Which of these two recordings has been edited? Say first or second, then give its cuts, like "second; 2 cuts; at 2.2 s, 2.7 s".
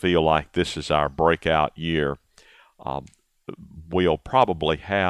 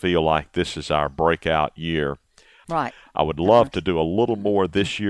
second; 1 cut; at 2.6 s